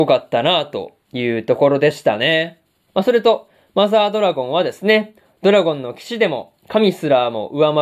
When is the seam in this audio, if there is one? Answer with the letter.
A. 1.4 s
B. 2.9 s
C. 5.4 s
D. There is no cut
B